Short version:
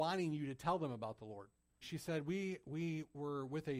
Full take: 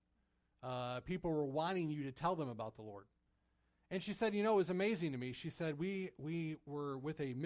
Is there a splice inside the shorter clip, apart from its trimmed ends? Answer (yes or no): yes